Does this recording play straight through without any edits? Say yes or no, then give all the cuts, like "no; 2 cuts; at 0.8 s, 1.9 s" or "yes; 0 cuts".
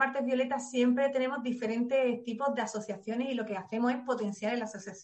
yes; 0 cuts